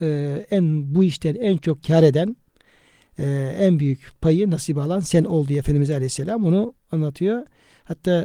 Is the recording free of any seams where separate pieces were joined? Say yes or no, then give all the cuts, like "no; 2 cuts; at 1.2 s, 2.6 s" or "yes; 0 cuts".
yes; 0 cuts